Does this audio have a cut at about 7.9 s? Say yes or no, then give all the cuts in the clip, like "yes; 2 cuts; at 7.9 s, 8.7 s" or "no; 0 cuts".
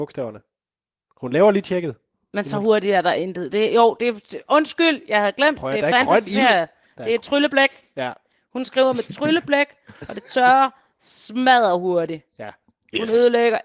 no; 0 cuts